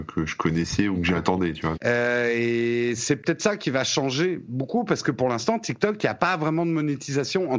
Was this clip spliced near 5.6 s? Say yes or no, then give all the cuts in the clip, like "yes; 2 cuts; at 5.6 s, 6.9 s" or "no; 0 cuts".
no; 1 cut; at 1.8 s